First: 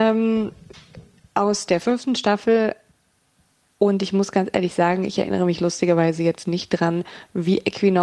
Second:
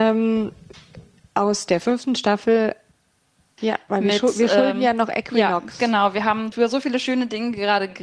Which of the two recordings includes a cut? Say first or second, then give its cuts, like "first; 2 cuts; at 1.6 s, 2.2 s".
second; 2 cuts; at 3.6 s, 6.5 s